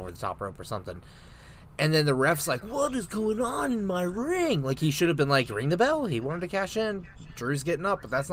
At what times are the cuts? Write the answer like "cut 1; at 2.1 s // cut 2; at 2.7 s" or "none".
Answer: cut 1; at 2.6 s